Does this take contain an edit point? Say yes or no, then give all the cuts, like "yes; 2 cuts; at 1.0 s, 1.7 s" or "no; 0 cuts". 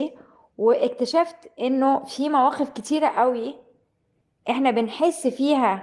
no; 0 cuts